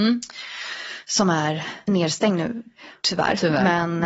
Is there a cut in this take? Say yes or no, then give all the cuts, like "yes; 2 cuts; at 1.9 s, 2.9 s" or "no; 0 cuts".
no; 0 cuts